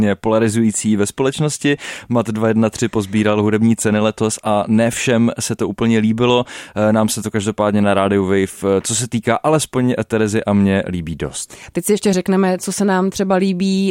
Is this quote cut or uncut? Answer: uncut